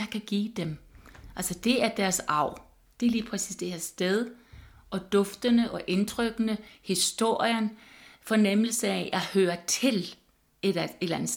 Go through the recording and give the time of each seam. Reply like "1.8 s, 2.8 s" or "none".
none